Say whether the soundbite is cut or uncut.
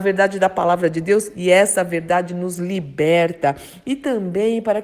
uncut